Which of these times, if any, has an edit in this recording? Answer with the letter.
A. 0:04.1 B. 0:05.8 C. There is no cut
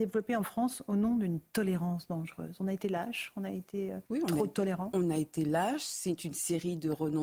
A